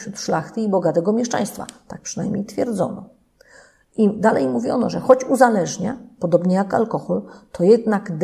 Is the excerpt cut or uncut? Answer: uncut